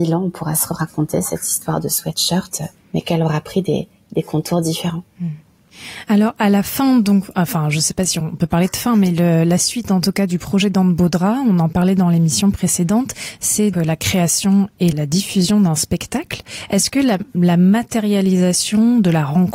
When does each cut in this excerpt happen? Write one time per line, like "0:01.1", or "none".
0:13.7
0:14.9